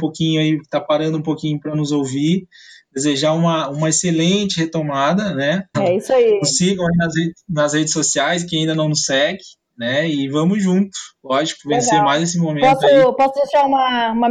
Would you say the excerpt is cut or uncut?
cut